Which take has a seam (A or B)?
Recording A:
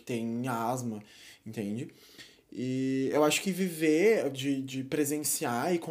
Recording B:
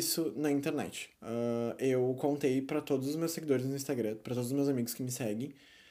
B